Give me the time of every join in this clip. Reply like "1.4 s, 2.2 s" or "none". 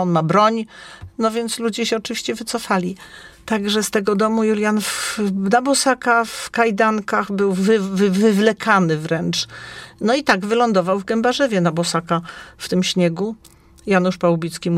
none